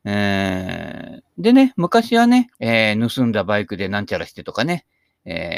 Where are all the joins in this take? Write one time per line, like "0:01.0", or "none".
0:02.5